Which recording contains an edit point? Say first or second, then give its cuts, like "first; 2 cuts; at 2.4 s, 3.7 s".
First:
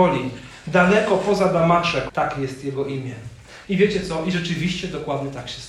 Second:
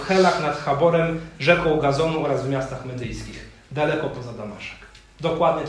first; 2 cuts; at 2.1 s, 3.6 s